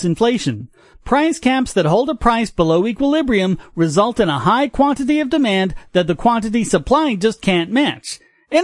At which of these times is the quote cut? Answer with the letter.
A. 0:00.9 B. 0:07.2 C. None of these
A